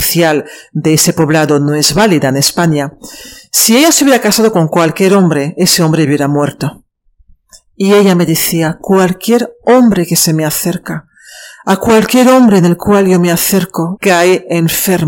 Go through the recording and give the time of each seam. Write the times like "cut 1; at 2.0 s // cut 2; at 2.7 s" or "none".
cut 1; at 14.0 s